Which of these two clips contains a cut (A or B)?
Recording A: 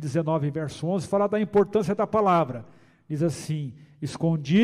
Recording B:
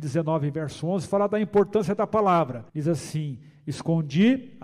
B